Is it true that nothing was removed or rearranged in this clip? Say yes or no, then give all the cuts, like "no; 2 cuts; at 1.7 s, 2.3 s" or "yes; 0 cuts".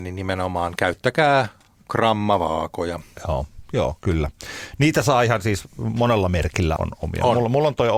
no; 1 cut; at 6.8 s